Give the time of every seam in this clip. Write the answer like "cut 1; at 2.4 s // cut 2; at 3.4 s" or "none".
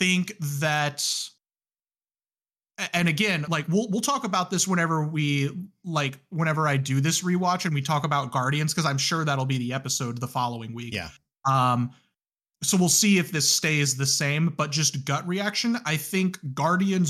none